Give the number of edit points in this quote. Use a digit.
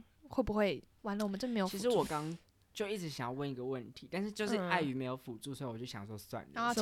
1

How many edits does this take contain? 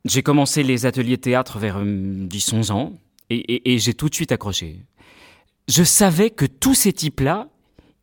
1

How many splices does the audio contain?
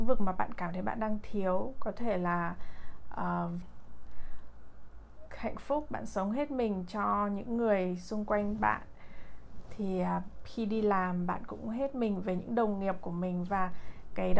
1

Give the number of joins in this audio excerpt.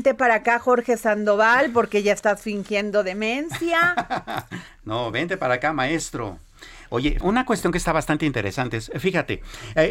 1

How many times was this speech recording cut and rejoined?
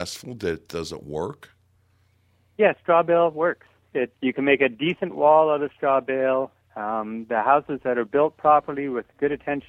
2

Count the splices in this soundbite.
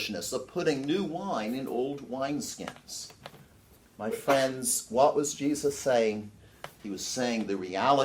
0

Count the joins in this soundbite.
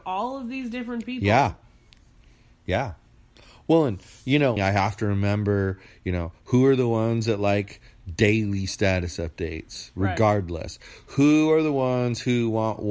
2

